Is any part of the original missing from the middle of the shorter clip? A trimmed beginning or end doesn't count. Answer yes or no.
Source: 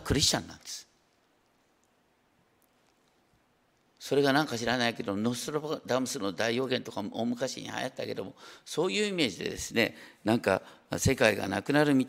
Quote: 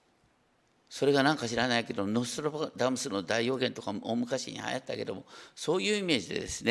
no